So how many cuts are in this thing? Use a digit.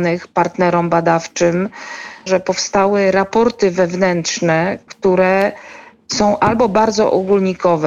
1